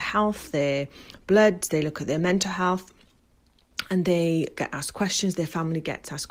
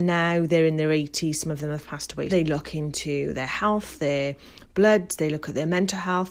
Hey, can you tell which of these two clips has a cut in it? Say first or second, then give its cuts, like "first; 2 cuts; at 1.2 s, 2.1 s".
second; 1 cut; at 2.3 s